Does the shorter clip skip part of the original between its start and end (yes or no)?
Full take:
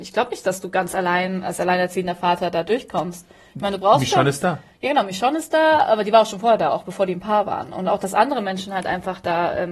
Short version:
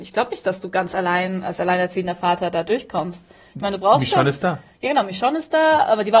no